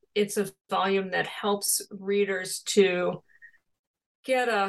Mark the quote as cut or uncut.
uncut